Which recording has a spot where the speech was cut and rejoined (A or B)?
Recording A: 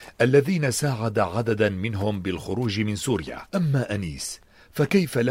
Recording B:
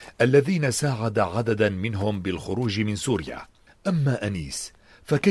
A